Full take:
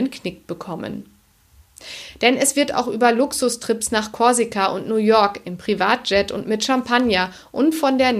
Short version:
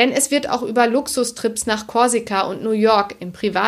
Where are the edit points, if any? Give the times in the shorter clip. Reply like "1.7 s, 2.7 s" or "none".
none